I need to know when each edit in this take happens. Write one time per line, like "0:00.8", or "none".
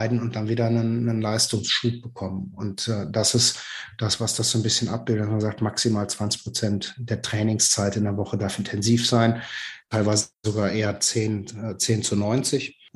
none

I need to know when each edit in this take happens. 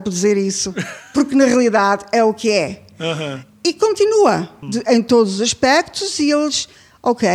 0:04.6

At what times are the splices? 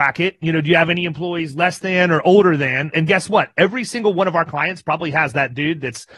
0:02.9

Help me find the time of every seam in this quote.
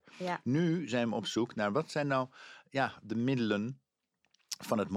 none

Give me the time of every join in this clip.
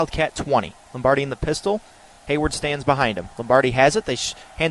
none

